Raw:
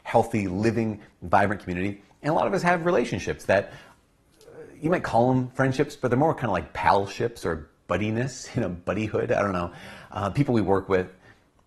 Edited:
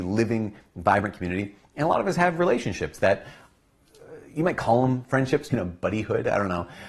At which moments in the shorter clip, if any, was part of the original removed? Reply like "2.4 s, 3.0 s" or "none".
5.5 s

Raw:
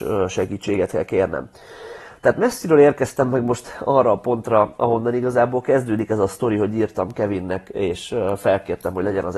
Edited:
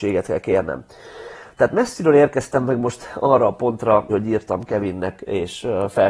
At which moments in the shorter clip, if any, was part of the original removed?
4.1 s

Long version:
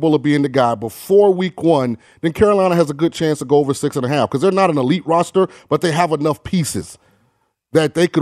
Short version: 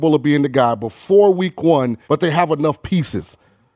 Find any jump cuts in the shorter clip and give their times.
2.0 s

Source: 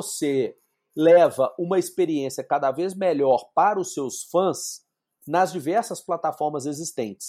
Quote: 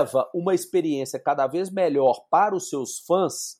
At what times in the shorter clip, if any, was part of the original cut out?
none

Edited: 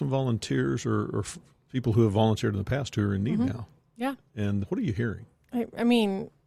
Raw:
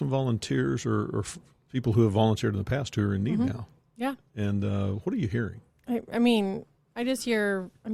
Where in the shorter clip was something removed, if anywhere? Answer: 4.6 s

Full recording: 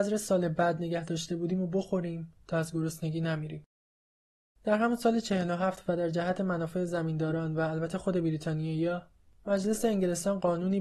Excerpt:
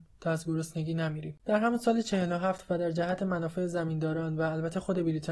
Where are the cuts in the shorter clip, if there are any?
1.4 s

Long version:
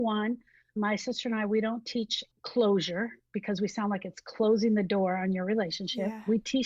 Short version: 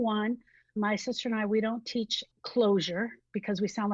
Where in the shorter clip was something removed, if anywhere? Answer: none

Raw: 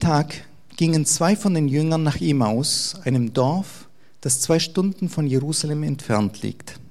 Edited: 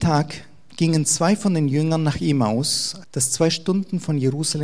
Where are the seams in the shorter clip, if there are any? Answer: 3.0 s

